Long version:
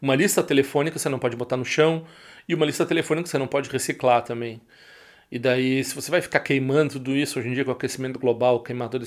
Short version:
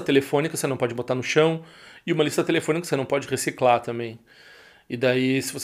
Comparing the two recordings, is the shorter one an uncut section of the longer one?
yes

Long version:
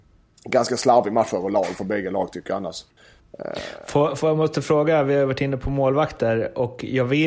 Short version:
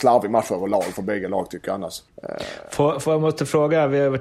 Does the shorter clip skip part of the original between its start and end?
yes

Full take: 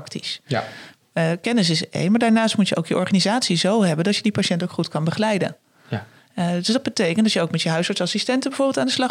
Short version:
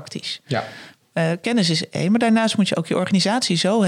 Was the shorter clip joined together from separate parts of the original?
no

